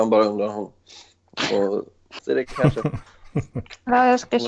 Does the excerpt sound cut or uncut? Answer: cut